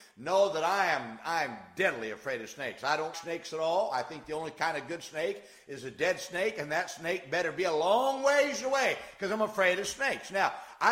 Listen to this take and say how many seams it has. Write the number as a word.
one